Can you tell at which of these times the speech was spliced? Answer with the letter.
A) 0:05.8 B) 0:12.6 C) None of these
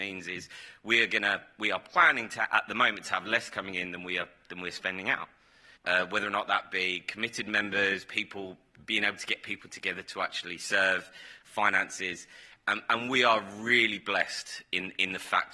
A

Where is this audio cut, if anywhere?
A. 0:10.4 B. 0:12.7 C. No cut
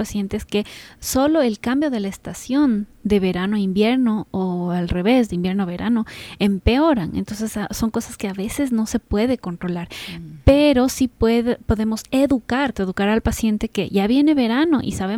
B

